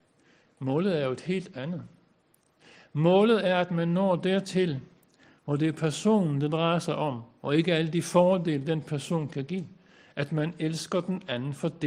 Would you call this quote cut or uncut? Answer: uncut